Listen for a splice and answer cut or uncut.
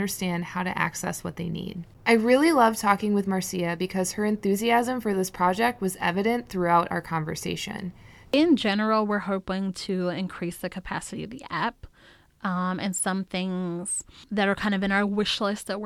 cut